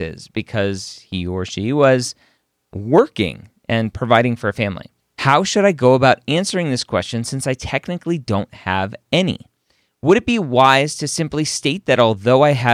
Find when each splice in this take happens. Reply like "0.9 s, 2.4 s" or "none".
5.0 s